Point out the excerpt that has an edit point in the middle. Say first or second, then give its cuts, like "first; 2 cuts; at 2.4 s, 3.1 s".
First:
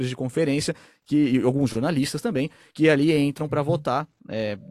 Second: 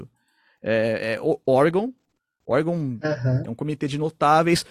second; 1 cut; at 3.4 s